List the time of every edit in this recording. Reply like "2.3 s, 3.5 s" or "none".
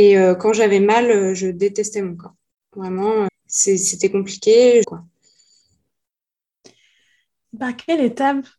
3.3 s, 4.8 s